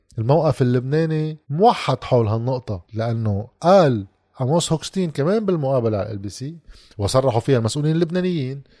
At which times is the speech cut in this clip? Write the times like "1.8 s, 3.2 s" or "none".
1.4 s, 2.8 s

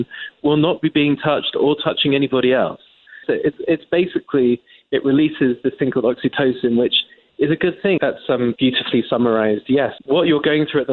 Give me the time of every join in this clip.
3.2 s, 8.0 s, 10.0 s

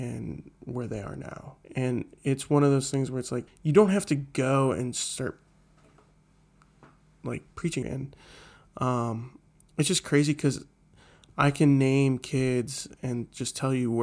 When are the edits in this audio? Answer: 1.6 s, 3.5 s, 7.8 s

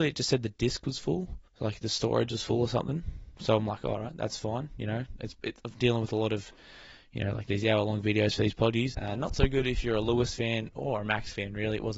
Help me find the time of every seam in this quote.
1.5 s, 8.9 s

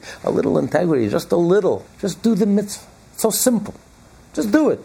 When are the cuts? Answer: 1.8 s

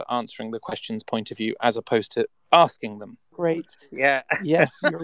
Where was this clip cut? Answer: 3.3 s

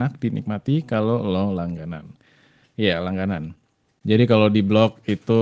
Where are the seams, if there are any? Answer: 3.9 s

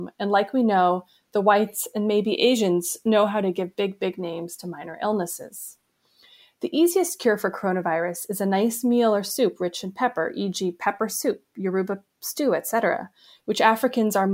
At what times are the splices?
none

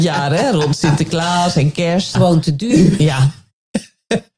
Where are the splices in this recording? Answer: 2.1 s

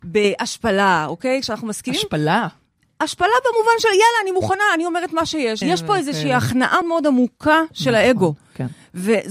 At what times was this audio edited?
5.6 s, 6.8 s

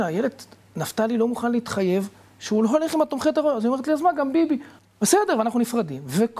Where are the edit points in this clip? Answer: 4.8 s

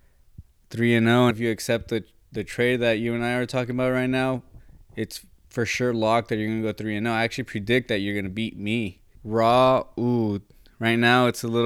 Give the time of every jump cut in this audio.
1.3 s, 9.1 s

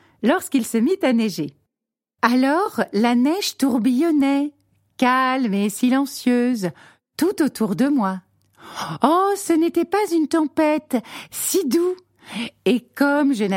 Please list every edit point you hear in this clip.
2.2 s, 11.3 s

